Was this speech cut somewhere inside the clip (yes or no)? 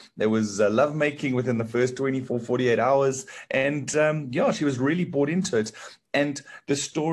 no